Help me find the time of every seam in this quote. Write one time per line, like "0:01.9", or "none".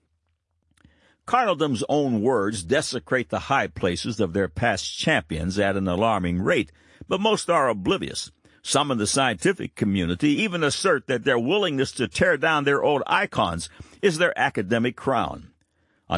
none